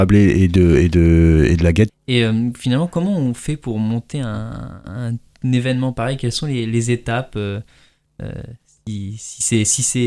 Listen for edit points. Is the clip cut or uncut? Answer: cut